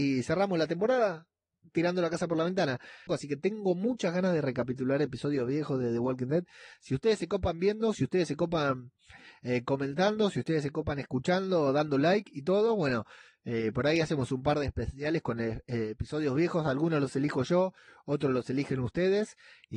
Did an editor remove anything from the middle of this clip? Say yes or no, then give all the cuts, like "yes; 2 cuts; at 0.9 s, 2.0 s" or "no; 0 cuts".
yes; 1 cut; at 3.1 s